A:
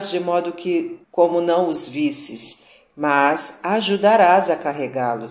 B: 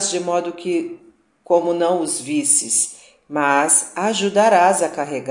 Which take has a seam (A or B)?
A